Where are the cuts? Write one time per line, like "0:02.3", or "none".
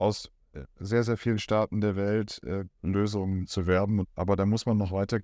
0:02.8
0:04.0